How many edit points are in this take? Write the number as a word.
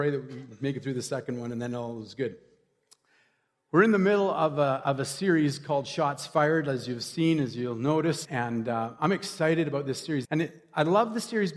two